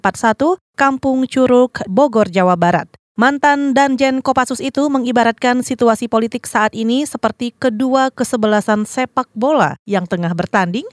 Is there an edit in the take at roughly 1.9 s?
yes; 1 cut; at 1.9 s

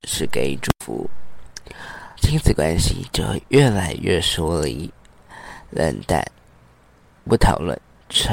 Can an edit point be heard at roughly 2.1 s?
yes; 1 cut; at 2.1 s

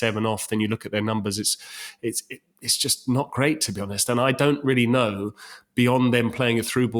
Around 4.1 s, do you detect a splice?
no; 0 cuts

